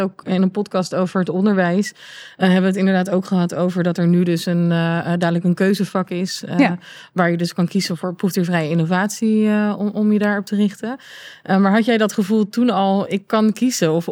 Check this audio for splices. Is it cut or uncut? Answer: uncut